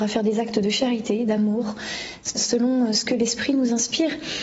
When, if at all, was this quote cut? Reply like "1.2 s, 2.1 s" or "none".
2.3 s